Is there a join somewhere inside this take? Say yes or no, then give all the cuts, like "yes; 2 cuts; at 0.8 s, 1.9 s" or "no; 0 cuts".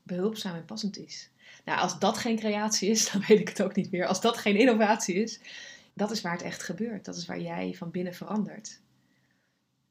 yes; 1 cut; at 5.9 s